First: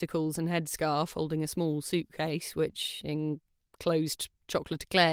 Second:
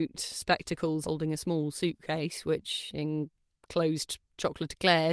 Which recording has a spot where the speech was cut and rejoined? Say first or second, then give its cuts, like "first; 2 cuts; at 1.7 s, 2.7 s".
second; 1 cut; at 1.0 s